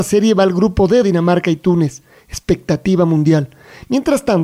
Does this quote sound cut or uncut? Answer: cut